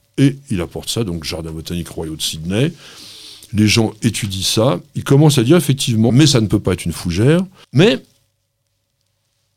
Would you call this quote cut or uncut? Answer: cut